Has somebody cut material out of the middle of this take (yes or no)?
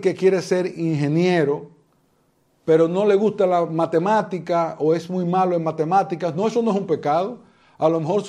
no